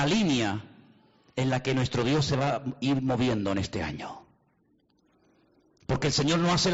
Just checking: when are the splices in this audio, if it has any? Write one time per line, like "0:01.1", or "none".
none